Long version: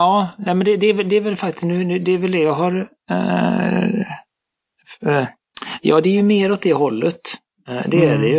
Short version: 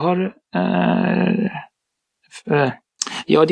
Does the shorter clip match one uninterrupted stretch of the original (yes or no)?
yes